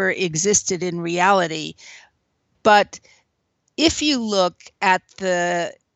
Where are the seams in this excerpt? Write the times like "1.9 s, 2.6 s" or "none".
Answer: 2.5 s